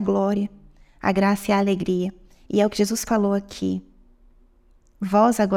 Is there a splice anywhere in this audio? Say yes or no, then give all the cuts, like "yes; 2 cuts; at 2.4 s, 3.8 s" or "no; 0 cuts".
no; 0 cuts